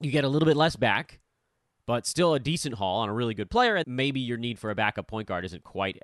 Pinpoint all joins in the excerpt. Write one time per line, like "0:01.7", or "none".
0:03.8